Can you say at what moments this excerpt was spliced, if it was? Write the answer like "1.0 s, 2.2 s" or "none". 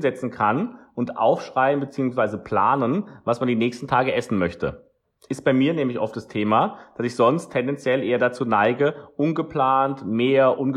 none